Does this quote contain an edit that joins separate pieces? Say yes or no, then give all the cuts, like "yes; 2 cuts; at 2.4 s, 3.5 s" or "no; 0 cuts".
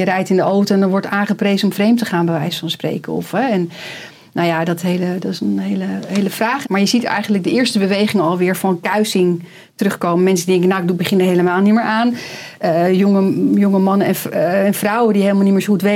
yes; 1 cut; at 6.6 s